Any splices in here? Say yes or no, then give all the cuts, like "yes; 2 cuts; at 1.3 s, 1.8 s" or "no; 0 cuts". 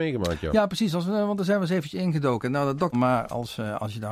yes; 1 cut; at 2.9 s